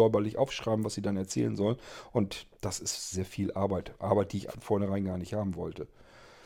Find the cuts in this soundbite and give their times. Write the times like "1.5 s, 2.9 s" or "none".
3.1 s, 4.5 s